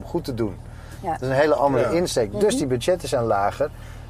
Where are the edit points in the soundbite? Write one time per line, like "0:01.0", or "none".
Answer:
none